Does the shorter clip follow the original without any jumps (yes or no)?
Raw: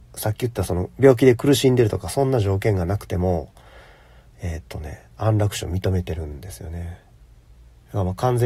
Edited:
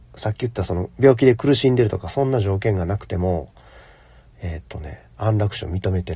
yes